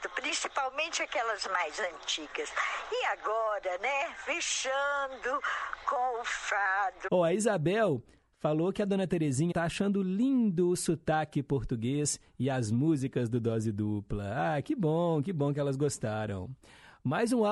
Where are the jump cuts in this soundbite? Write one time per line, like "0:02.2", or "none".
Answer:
0:07.1
0:09.5

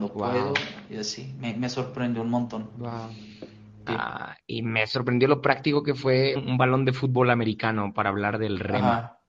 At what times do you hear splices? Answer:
0:03.9
0:06.4

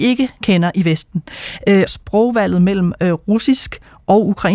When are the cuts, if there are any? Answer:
0:01.9

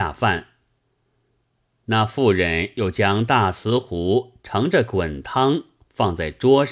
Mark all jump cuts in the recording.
none

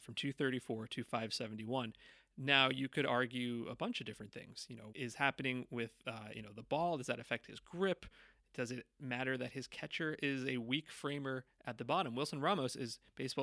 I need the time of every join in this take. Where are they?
0:04.9

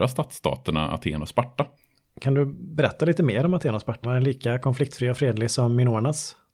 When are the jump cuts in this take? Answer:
0:04.0

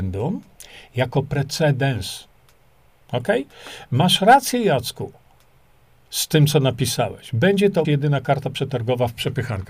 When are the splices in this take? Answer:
0:07.8

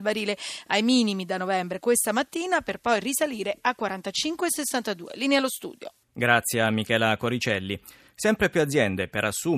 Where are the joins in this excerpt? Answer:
0:06.0

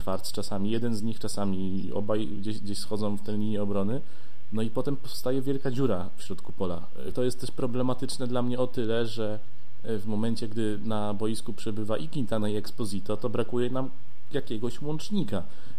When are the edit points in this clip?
0:07.1

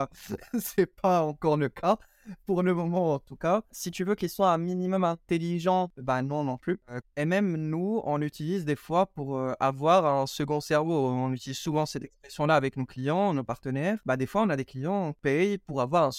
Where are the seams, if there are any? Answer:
0:07.0

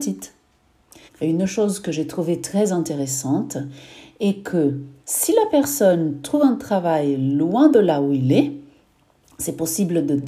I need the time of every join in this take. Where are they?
0:01.1
0:05.0

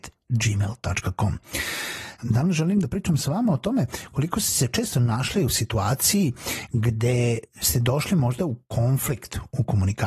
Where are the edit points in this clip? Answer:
0:02.2

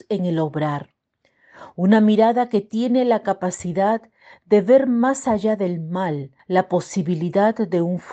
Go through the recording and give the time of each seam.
0:06.4

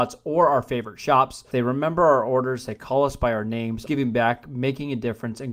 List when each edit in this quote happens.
0:01.5
0:03.9

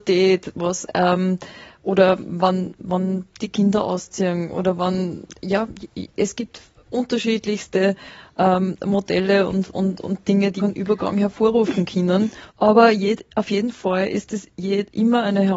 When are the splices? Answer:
0:10.6
0:12.5

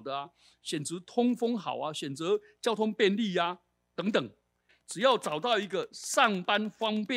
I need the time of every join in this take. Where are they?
0:04.7

